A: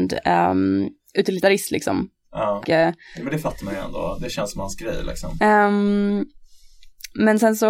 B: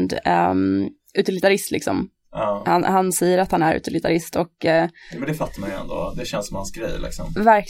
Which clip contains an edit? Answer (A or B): A